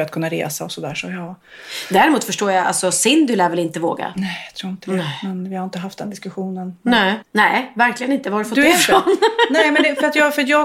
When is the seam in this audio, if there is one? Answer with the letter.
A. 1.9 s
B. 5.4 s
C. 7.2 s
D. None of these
C